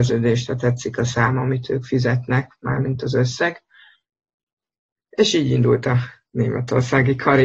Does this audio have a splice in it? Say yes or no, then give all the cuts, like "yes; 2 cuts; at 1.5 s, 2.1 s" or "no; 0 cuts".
no; 0 cuts